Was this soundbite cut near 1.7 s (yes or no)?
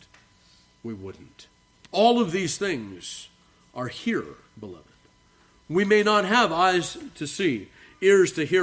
yes